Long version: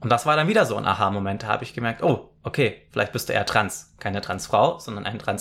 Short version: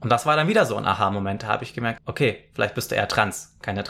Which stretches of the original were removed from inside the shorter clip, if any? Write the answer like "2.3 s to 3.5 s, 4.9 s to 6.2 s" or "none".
2.0 s to 2.4 s